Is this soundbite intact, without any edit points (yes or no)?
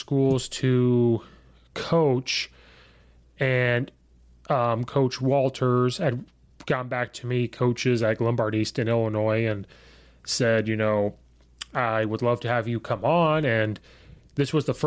yes